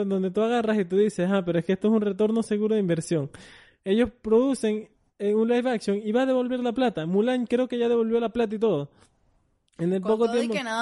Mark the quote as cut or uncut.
uncut